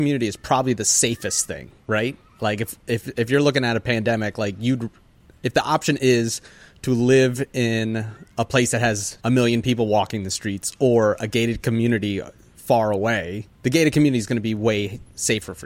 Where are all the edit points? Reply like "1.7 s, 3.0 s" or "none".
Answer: 1.8 s, 9.2 s, 13.5 s

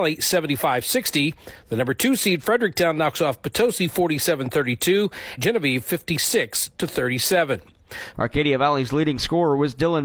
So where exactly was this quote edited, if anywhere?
5.4 s, 8.1 s

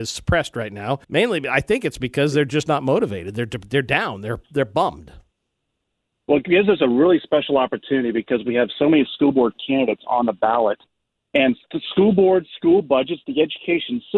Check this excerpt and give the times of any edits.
1.0 s

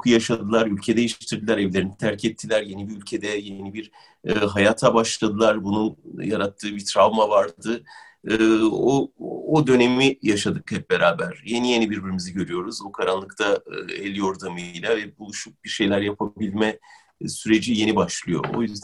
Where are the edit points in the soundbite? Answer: none

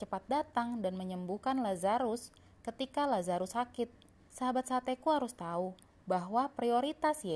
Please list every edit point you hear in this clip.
4.3 s

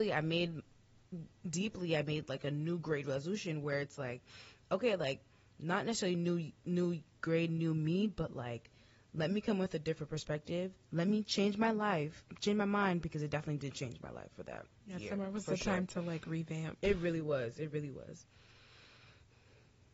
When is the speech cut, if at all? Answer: none

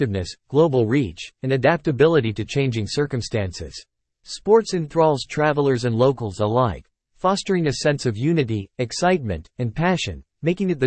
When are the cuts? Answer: 4.1 s

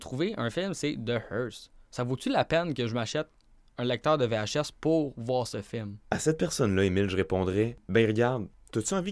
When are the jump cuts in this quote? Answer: 6.0 s

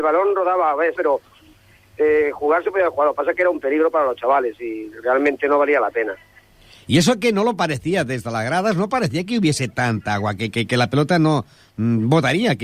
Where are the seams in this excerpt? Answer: 1.0 s

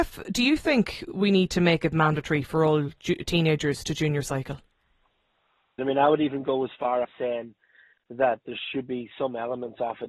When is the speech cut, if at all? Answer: 5.8 s, 7.0 s

